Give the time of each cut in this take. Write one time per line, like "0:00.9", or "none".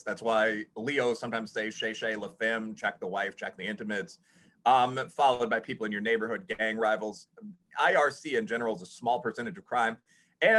none